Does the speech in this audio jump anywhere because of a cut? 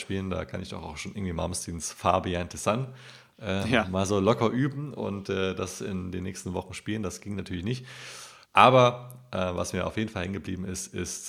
yes; 1 cut; at 8.4 s

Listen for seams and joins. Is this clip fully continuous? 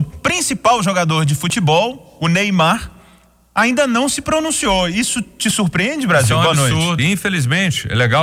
no; 1 cut; at 7.0 s

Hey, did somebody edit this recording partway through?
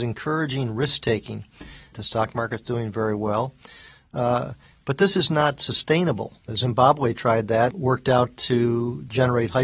yes; 3 cuts; at 1.9 s, 6.5 s, 7.7 s

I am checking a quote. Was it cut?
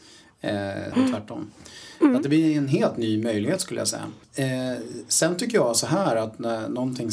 yes; 1 cut; at 0.9 s

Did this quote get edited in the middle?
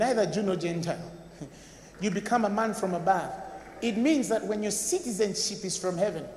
yes; 1 cut; at 1.9 s

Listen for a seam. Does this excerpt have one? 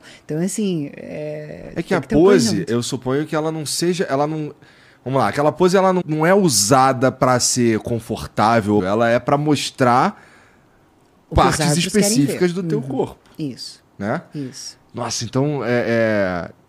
yes; 2 cuts; at 6.0 s, 8.8 s

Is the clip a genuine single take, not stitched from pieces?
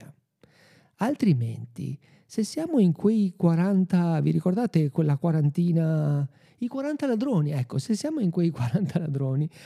yes; 0 cuts

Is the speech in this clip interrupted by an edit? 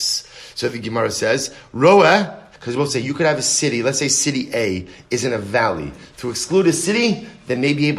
yes; 2 cuts; at 2.5 s, 6.1 s

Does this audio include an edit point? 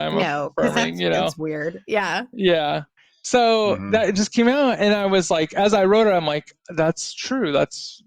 no; 0 cuts

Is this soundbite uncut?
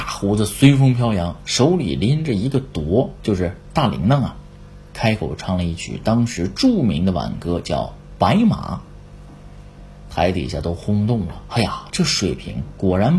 no; 1 cut; at 4.9 s

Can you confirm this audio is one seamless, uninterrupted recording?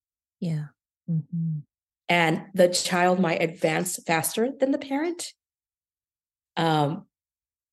no; 2 cuts; at 0.9 s, 6.5 s

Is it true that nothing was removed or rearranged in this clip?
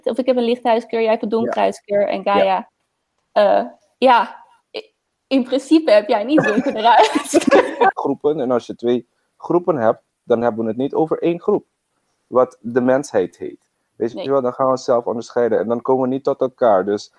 no; 1 cut; at 7.9 s

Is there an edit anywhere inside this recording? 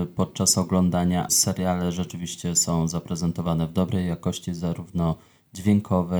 yes; 1 cut; at 1.3 s

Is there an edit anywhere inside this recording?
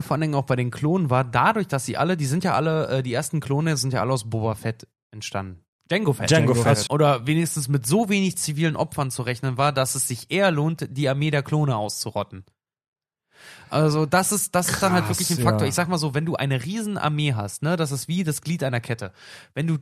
yes; 1 cut; at 6.9 s

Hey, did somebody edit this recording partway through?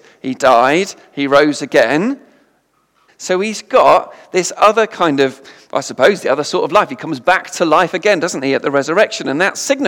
yes; 1 cut; at 3.1 s

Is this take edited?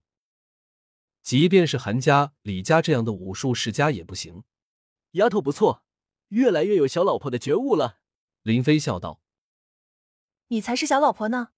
yes; 2 cuts; at 5.0 s, 8.2 s

